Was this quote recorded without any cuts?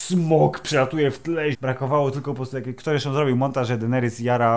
no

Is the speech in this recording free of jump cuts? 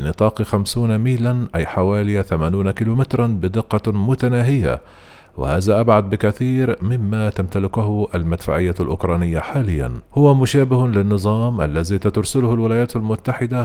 no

